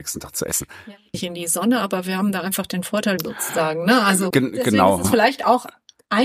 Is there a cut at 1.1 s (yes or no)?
yes